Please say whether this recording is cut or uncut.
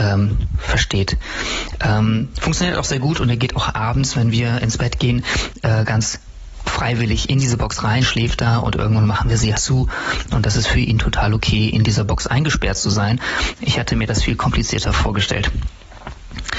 cut